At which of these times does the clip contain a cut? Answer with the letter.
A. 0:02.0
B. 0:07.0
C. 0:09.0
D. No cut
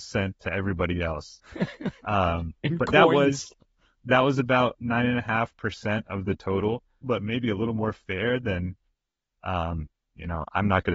B